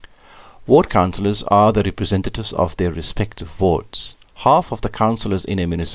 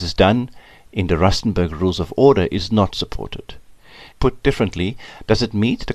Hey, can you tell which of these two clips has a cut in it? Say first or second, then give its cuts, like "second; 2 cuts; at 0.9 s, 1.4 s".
second; 1 cut; at 4.1 s